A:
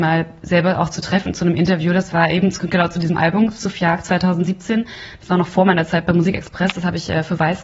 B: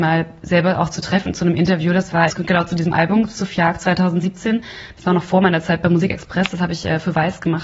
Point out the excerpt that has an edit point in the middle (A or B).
B